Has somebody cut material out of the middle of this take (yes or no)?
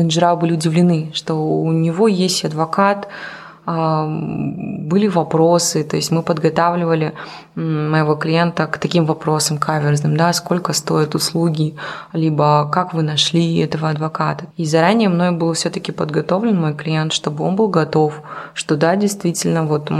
yes